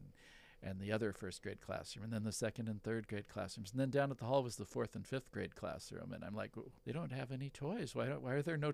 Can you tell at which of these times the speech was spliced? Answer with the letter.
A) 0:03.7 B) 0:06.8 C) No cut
B